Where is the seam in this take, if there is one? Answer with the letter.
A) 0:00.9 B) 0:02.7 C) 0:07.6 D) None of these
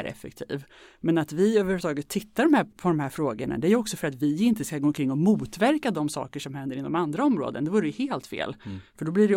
B